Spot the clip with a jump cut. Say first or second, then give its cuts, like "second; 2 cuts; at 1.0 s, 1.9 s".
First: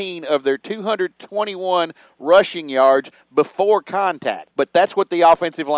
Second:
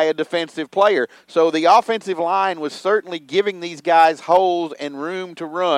first; 1 cut; at 4.5 s